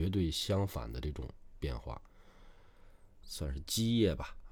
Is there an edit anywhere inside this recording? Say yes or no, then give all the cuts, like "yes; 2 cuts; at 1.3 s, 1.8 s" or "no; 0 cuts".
yes; 1 cut; at 3.2 s